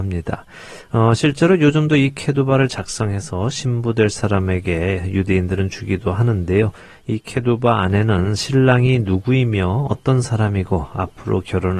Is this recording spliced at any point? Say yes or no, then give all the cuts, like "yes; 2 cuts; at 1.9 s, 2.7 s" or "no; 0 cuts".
no; 0 cuts